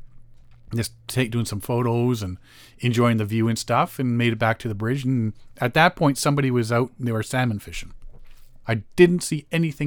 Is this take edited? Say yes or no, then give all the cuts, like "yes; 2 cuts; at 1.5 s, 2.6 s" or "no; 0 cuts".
yes; 1 cut; at 8.6 s